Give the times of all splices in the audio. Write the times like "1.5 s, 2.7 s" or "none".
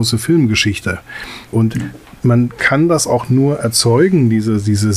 1.5 s